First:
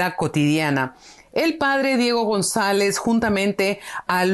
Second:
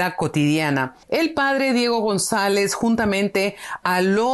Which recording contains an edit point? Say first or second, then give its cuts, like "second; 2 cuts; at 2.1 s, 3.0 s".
second; 1 cut; at 1.0 s